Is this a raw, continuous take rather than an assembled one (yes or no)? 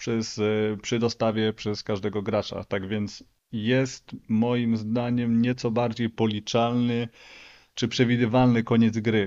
yes